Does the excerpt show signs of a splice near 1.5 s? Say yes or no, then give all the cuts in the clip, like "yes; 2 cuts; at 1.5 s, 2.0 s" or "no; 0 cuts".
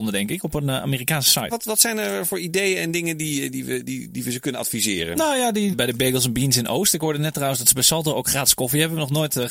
yes; 2 cuts; at 1.5 s, 5.7 s